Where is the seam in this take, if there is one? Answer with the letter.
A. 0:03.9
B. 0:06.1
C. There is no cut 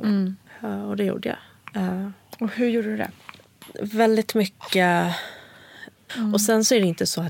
B